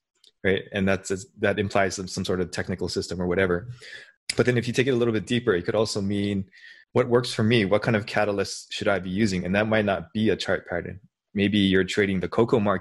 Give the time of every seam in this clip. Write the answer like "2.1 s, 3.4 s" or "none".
none